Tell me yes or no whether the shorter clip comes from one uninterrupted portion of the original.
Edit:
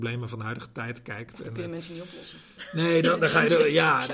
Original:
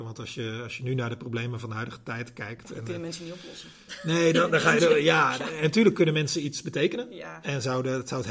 yes